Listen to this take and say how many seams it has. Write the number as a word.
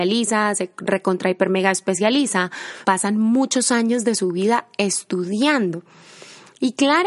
one